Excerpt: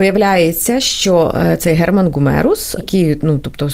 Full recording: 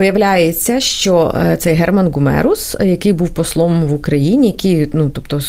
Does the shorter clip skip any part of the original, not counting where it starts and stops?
yes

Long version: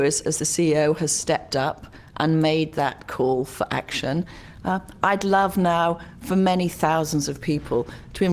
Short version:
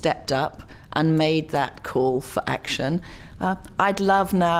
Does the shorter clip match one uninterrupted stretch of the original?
yes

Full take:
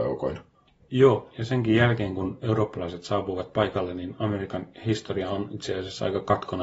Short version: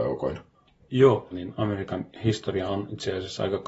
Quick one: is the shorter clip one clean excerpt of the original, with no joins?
no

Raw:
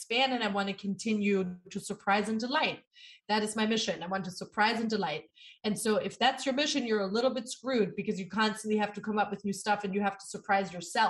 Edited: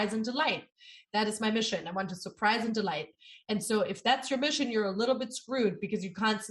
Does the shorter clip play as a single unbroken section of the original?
yes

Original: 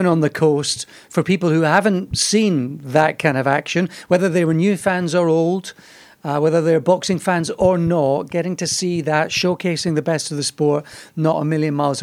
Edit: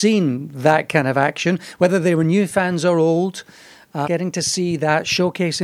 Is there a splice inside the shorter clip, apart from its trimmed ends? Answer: yes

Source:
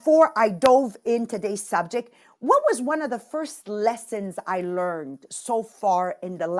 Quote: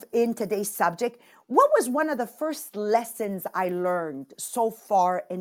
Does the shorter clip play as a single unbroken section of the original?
yes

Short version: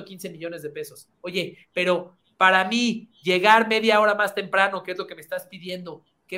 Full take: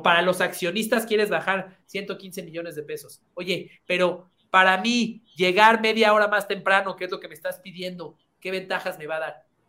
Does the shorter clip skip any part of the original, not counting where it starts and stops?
no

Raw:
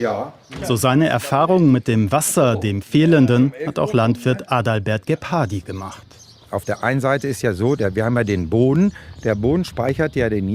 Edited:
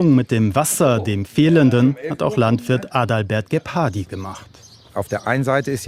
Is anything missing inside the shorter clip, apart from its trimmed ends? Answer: no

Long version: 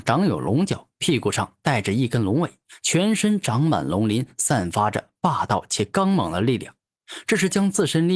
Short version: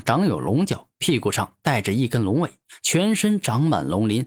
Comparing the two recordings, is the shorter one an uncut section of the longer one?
yes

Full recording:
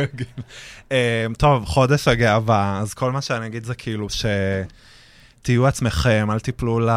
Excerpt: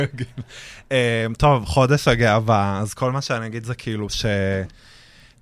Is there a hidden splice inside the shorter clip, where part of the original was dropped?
no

